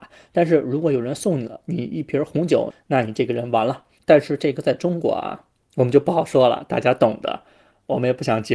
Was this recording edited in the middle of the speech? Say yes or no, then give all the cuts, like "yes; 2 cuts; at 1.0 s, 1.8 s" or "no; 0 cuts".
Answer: yes; 2 cuts; at 2.7 s, 4.0 s